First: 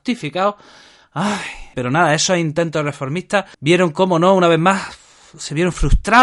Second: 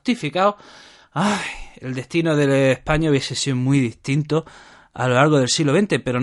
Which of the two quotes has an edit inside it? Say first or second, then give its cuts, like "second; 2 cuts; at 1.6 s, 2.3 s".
first; 2 cuts; at 1.7 s, 3.5 s